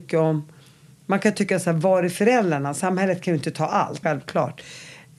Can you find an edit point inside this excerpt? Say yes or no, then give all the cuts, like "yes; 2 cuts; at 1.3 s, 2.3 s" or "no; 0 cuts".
yes; 1 cut; at 4.0 s